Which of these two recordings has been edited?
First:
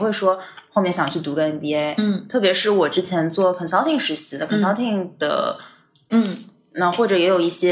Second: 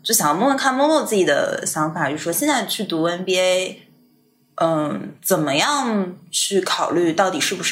first; 1 cut; at 6.1 s

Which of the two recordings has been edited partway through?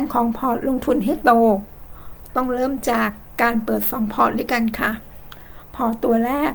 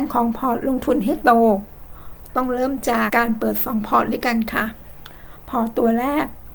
second; 1 cut; at 3.1 s

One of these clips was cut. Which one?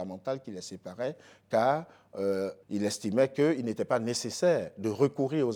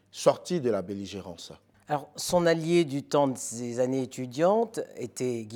first; 1 cut; at 2.6 s

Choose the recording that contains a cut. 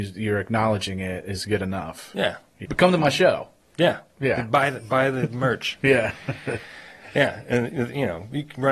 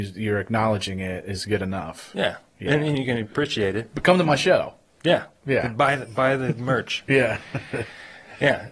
first; 1 cut; at 2.6 s

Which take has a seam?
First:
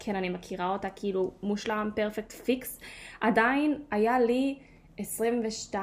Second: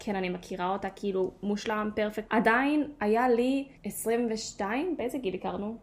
second; 2 cuts; at 2.3 s, 3.8 s

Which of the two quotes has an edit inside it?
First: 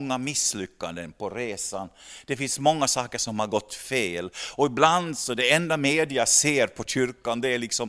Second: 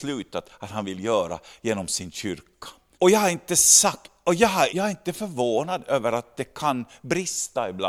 second; 2 cuts; at 2.9 s, 4.7 s

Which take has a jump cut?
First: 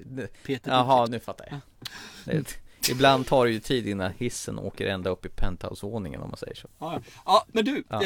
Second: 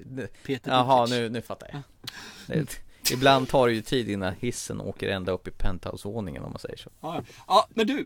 first; 1 cut; at 1.1 s

